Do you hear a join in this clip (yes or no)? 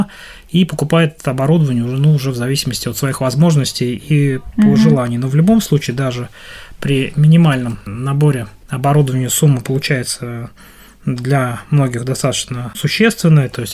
no